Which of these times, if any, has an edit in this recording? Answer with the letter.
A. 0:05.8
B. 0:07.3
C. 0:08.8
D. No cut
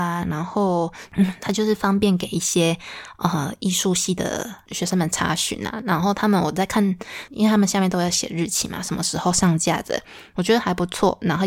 B